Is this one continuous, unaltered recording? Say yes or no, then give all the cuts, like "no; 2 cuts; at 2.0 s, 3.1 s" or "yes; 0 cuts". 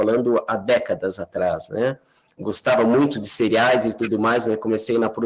no; 1 cut; at 2.4 s